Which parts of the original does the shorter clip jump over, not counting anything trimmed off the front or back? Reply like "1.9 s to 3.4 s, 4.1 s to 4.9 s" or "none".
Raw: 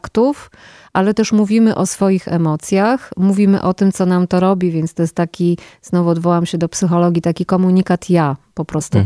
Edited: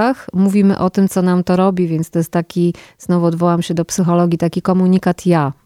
none